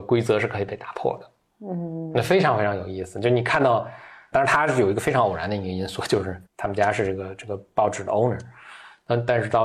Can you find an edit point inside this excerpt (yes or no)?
yes